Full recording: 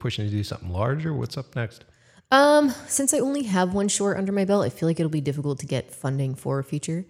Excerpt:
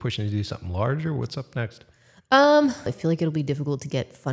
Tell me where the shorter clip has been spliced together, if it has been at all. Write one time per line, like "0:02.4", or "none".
0:02.9